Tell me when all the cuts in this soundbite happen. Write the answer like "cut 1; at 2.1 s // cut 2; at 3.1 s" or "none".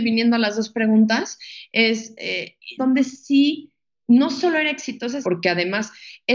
cut 1; at 2.8 s // cut 2; at 5.2 s